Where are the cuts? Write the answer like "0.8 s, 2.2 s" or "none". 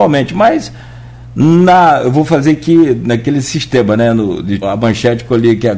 4.6 s

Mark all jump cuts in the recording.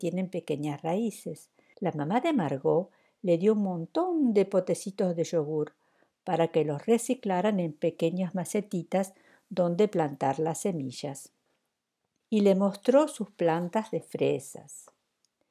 1.7 s, 12.2 s

